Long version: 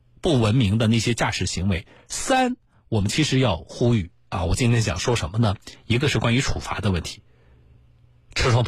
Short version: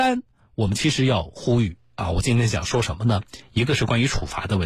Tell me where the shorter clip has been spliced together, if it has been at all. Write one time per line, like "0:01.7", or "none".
none